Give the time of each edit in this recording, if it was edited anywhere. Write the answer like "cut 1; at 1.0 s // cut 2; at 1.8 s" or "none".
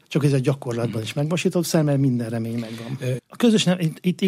cut 1; at 3.2 s